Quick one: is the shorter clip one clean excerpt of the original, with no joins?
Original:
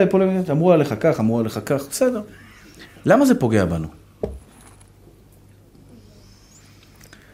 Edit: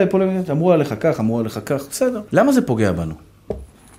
no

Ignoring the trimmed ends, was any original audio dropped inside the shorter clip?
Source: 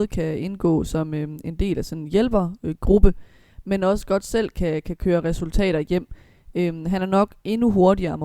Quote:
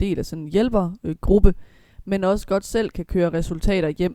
yes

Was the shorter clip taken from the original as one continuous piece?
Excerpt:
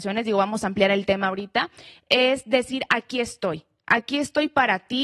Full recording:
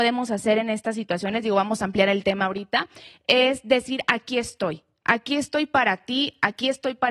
yes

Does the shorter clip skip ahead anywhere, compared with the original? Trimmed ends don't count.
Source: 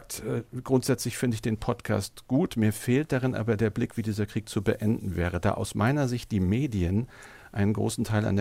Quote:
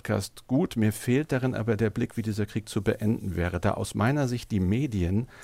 no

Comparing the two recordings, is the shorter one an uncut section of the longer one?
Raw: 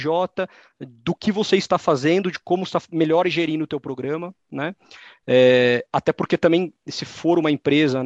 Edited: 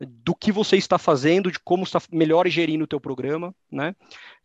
yes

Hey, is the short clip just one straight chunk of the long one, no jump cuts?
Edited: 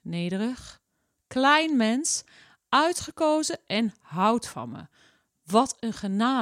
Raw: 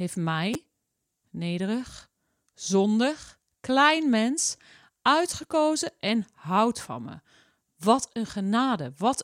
no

